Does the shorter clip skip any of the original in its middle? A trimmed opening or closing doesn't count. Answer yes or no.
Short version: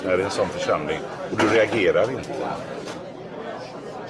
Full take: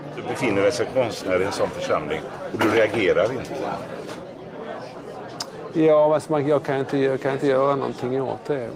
no